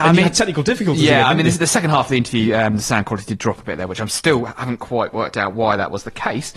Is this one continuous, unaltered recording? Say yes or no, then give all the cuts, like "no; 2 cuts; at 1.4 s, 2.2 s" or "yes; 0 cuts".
yes; 0 cuts